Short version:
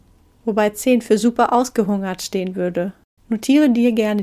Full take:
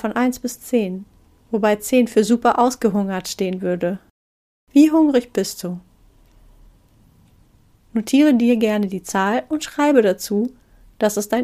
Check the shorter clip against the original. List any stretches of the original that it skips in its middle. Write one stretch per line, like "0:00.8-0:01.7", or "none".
0:04.2-0:07.8